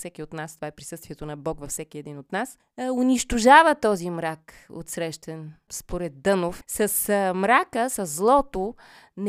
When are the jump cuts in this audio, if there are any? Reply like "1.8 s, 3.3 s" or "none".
none